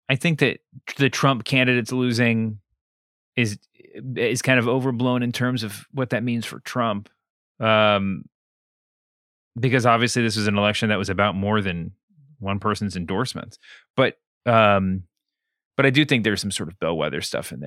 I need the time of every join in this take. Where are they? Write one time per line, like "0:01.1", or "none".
none